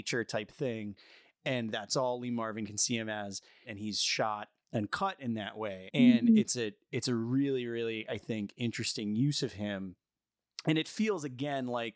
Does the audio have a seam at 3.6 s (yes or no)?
yes